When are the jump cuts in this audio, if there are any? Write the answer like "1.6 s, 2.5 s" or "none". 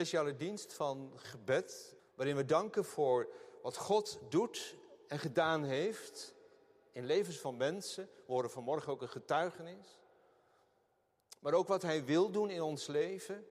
2.0 s